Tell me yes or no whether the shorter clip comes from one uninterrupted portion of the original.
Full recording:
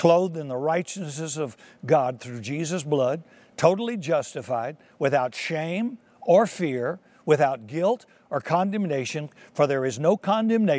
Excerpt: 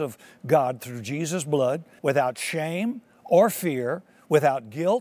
no